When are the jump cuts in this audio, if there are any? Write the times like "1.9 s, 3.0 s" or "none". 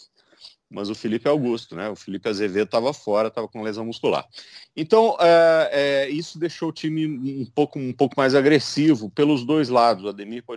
none